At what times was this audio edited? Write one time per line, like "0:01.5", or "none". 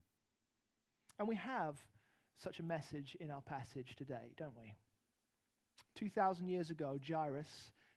none